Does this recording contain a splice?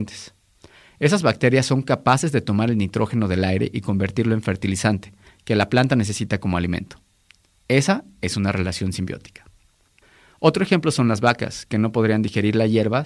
no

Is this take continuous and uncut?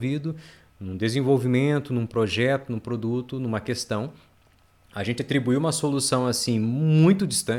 yes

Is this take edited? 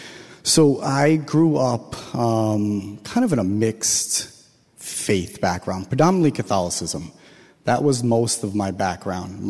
no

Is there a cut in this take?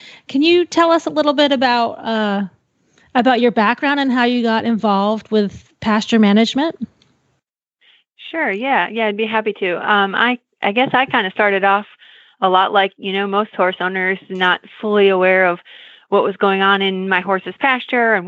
no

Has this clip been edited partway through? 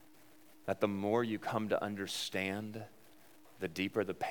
no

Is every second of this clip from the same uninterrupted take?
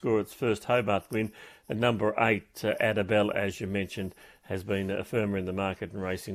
yes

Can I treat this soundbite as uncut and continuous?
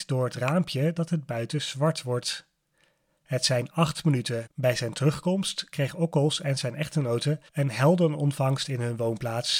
no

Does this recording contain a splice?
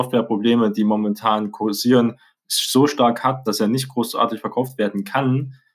no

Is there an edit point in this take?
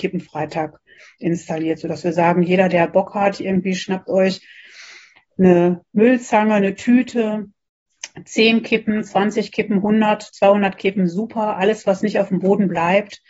no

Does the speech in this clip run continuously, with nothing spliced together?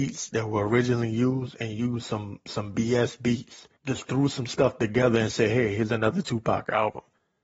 no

